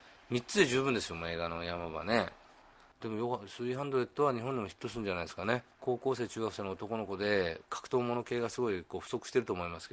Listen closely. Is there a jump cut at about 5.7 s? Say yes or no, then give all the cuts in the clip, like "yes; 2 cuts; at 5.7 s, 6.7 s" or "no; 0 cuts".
yes; 2 cuts; at 5.7 s, 7.7 s